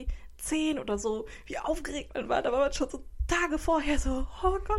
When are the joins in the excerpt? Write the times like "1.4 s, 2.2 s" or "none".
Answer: none